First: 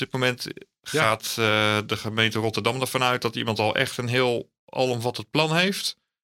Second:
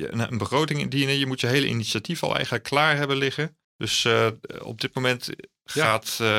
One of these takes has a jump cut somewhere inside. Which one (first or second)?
second